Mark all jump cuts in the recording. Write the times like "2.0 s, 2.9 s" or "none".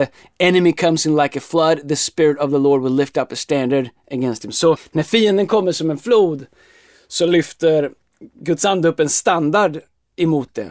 4.8 s